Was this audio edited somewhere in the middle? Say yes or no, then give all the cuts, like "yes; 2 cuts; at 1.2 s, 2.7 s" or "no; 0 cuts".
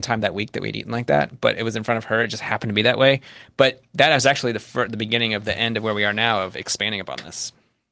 no; 0 cuts